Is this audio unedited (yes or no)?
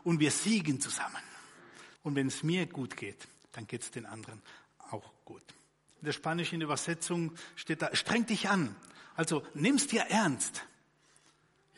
no